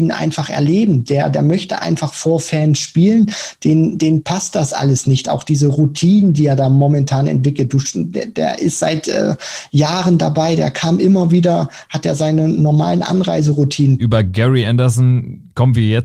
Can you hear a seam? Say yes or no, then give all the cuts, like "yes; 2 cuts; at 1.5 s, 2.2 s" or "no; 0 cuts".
yes; 1 cut; at 14.0 s